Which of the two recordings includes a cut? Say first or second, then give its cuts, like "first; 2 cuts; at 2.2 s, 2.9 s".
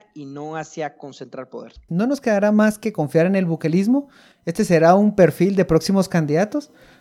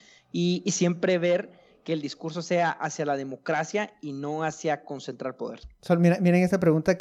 first; 1 cut; at 1.9 s